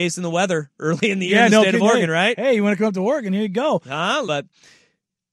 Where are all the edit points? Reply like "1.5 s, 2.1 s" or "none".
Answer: 4.2 s